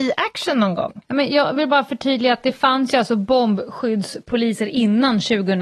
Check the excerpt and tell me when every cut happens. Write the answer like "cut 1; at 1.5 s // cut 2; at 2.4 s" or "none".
cut 1; at 1.0 s